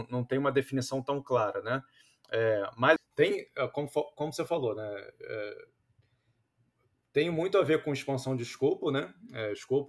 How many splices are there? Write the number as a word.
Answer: one